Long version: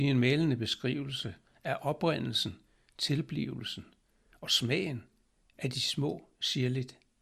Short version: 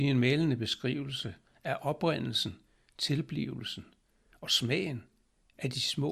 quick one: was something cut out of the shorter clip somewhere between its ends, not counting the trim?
no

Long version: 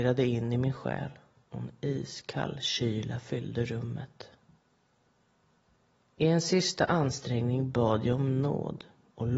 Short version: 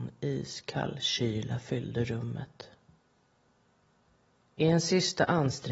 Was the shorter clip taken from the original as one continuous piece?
yes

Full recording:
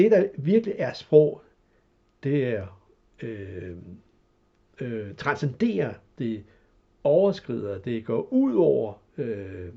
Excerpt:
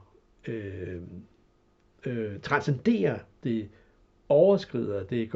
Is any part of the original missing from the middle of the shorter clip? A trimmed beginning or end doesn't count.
no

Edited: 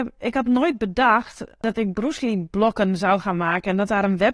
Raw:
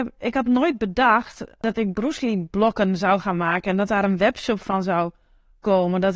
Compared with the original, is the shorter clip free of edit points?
yes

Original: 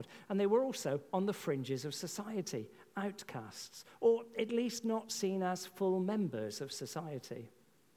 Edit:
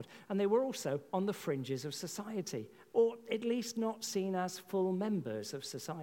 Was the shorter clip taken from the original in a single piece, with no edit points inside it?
no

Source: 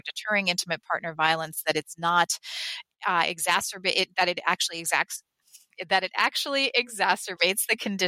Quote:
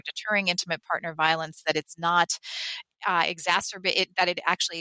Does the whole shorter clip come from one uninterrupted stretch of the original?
yes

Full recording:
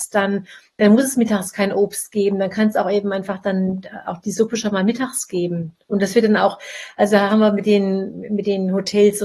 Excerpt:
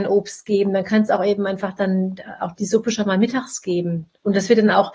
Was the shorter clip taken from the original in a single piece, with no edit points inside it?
yes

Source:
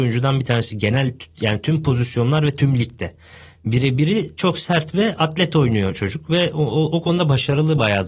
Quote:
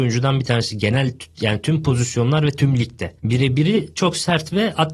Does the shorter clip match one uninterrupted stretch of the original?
no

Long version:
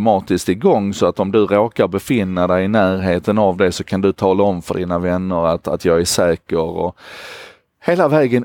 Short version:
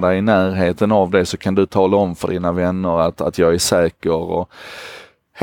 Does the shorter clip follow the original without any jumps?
yes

